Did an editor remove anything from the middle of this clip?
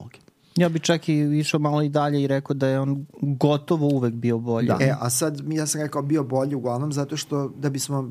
yes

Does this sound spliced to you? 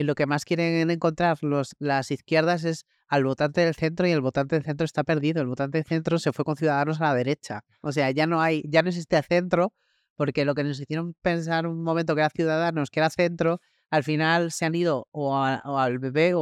no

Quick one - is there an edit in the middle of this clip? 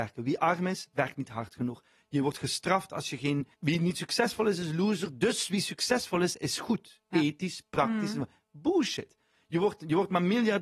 yes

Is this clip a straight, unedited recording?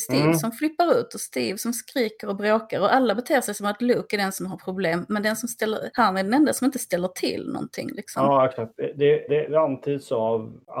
no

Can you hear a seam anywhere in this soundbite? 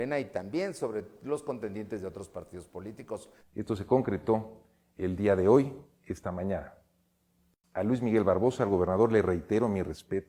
yes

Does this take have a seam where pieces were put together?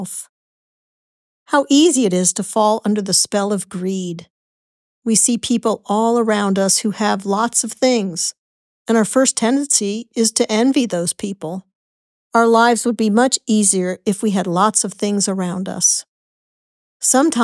no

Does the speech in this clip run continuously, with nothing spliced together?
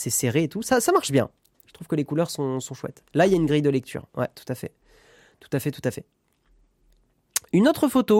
yes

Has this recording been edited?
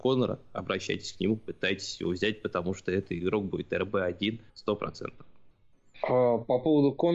no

